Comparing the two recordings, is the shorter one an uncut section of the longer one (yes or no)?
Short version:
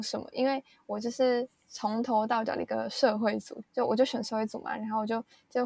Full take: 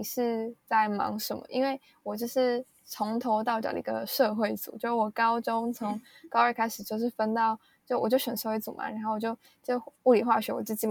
no